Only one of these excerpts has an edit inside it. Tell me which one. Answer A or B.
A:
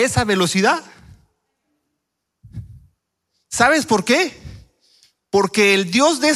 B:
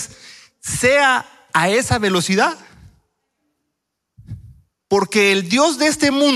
B